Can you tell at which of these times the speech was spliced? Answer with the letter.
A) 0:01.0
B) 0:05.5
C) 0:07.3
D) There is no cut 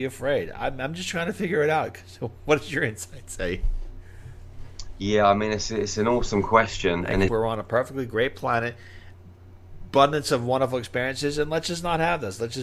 C